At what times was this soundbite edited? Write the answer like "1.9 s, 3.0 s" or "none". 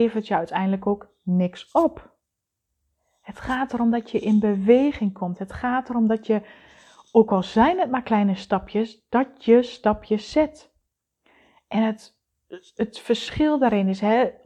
none